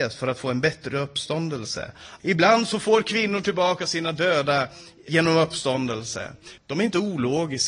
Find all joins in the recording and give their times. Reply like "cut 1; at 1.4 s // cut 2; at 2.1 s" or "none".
cut 1; at 2.2 s // cut 2; at 5.1 s // cut 3; at 6.6 s